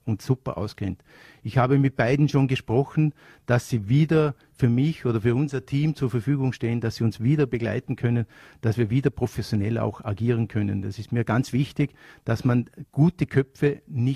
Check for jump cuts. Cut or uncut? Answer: uncut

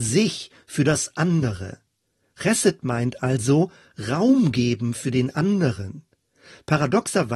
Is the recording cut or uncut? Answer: uncut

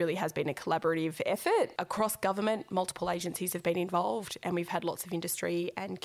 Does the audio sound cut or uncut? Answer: uncut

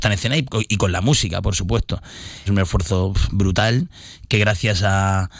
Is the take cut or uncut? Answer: cut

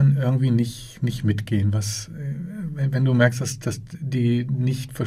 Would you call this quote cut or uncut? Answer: uncut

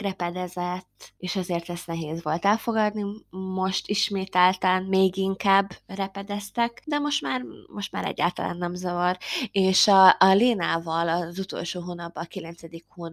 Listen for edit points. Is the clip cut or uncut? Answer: uncut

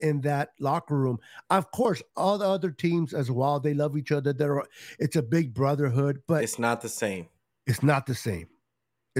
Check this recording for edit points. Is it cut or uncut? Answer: uncut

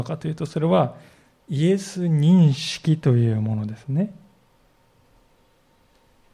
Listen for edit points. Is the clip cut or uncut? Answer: uncut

